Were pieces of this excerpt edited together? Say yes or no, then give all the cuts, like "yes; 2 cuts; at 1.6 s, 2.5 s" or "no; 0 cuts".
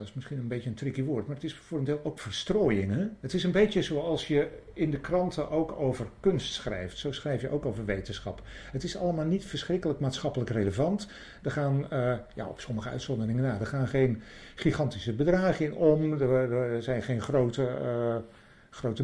no; 0 cuts